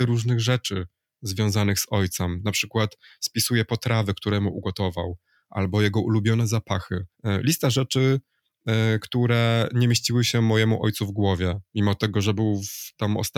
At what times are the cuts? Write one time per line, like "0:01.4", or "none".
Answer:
0:07.1